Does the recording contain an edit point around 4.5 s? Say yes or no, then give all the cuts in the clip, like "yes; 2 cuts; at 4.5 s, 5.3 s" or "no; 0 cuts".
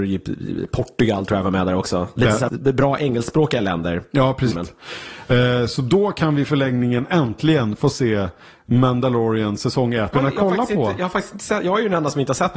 yes; 3 cuts; at 2.5 s, 4.5 s, 10.1 s